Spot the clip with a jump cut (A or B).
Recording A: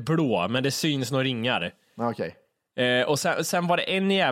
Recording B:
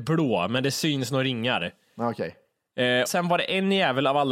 B